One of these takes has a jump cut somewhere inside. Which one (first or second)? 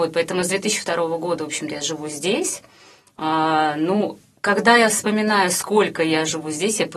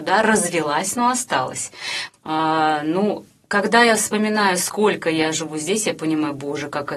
second